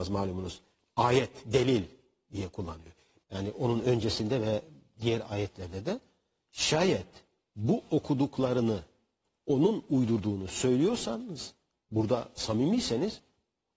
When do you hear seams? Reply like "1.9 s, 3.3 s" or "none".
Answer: 3.2 s